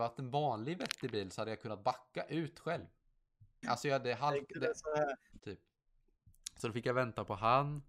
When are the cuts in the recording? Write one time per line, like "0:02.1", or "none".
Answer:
0:03.6
0:05.4